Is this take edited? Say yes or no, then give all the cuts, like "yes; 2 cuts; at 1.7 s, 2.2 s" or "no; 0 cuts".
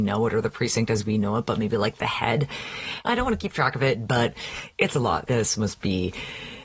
yes; 2 cuts; at 3.0 s, 5.3 s